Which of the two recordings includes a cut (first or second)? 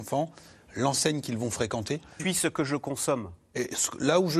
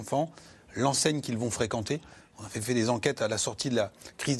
first